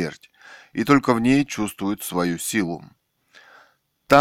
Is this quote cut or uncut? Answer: uncut